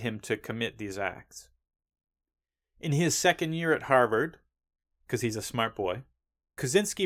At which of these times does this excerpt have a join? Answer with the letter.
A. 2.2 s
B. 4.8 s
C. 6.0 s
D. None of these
D